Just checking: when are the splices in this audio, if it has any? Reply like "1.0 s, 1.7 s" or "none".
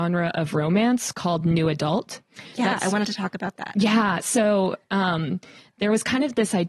none